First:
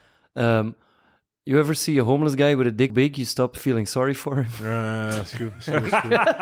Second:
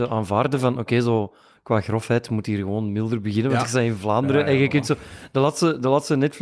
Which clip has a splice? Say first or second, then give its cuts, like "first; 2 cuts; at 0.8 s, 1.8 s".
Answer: first; 1 cut; at 2.9 s